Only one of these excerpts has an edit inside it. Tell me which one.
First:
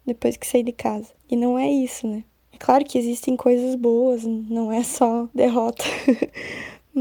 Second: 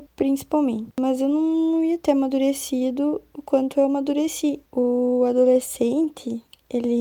second; 1 cut; at 4.6 s

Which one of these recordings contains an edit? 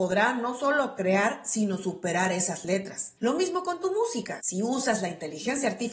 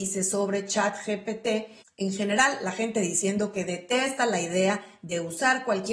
first; 2 cuts; at 3.2 s, 4.4 s

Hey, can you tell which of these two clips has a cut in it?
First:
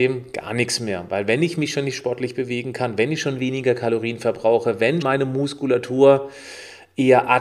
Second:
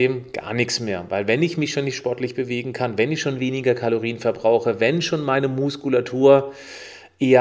first; 1 cut; at 5.0 s

